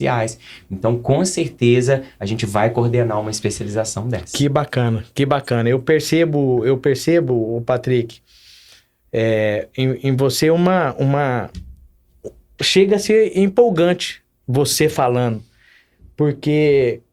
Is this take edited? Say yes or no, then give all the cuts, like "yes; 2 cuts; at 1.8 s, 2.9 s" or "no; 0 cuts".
no; 0 cuts